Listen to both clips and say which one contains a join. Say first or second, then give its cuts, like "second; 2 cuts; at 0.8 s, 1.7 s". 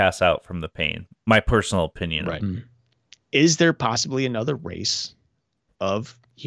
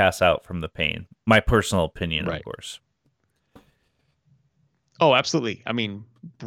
first; 1 cut; at 2.4 s